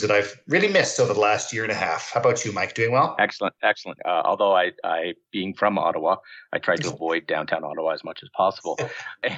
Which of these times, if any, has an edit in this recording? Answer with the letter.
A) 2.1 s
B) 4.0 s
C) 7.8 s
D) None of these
B